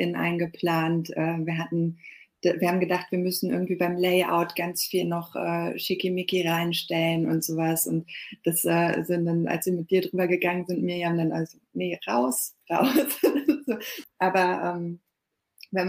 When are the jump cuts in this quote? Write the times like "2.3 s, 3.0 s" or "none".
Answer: 14.0 s